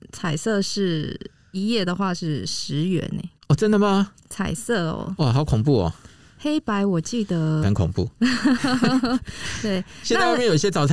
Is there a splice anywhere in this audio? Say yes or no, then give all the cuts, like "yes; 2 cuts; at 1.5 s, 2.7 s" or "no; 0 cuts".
yes; 2 cuts; at 3.4 s, 7.6 s